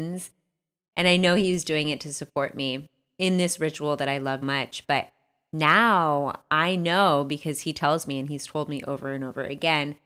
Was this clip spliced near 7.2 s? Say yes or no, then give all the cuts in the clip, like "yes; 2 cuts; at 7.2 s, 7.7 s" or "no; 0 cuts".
no; 2 cuts; at 0.9 s, 4.4 s